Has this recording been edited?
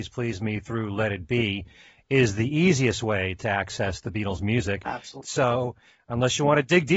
yes; 1 cut; at 5.2 s

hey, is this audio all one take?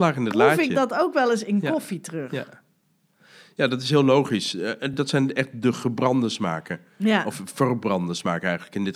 yes; 0 cuts

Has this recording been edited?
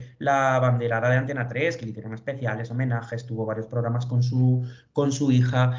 no; 0 cuts

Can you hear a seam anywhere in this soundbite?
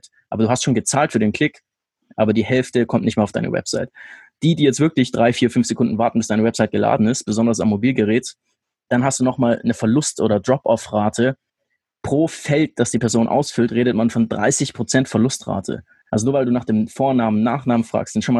yes; 1 cut; at 8.9 s

